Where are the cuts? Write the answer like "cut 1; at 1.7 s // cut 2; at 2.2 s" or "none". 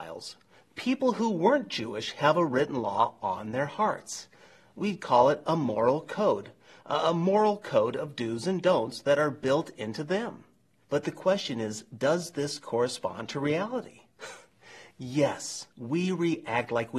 cut 1; at 10.8 s // cut 2; at 15.7 s